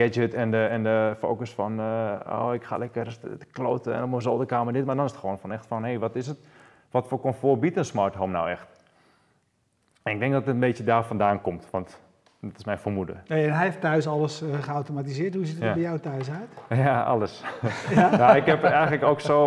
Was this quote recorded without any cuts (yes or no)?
yes